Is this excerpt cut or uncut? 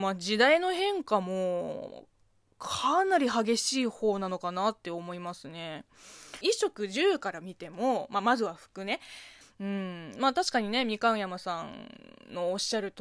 cut